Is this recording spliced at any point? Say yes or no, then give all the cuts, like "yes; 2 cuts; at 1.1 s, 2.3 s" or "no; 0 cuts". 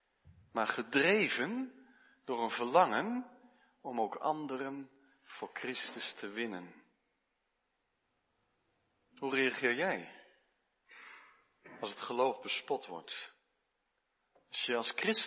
no; 0 cuts